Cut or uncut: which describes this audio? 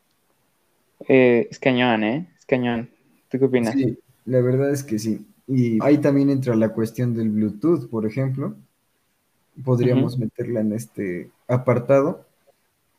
cut